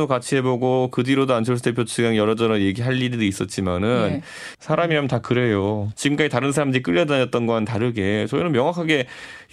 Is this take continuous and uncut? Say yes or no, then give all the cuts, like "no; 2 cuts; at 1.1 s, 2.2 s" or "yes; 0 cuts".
no; 2 cuts; at 4.5 s, 5.9 s